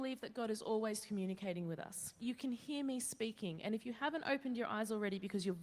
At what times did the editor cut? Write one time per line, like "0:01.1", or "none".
0:02.2